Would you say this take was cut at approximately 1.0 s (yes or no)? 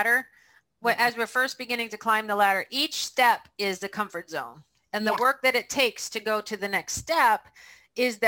no